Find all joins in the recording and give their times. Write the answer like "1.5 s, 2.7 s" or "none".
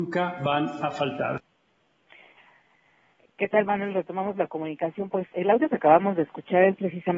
none